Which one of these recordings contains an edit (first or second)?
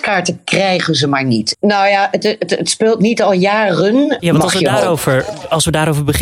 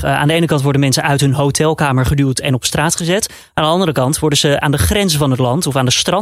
first